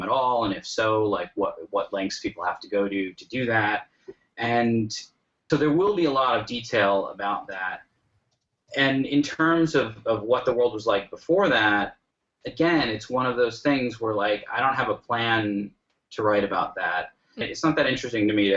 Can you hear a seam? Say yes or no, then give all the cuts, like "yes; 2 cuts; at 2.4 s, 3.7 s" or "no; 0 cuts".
yes; 2 cuts; at 5.5 s, 17.4 s